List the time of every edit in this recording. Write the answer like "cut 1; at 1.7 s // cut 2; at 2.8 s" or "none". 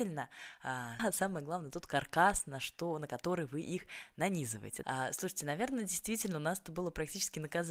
cut 1; at 1.0 s // cut 2; at 4.8 s